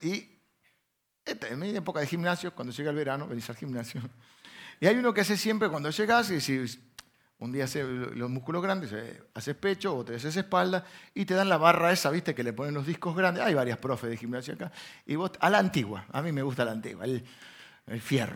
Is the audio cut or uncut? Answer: uncut